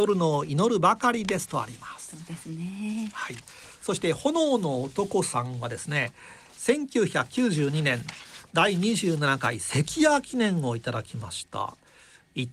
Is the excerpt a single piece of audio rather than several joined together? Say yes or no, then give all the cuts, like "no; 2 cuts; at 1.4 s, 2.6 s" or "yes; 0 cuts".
yes; 0 cuts